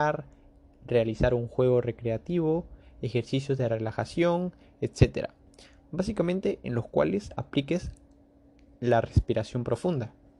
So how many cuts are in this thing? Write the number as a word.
zero